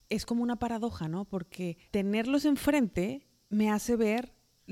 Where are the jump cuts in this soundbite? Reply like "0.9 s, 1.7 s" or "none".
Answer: 1.9 s